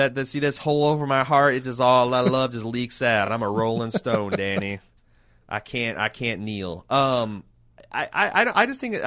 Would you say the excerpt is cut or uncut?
uncut